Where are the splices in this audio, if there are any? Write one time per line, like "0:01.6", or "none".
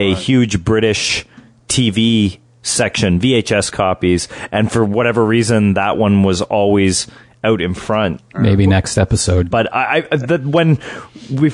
0:08.2
0:09.5